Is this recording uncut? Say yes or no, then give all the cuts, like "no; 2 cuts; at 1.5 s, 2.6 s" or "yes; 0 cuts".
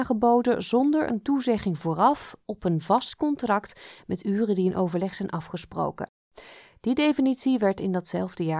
yes; 0 cuts